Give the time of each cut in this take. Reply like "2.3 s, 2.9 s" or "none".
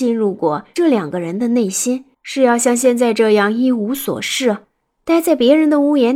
2.1 s